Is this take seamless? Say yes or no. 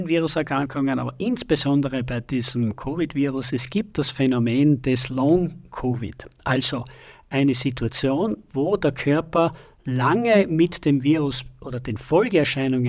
yes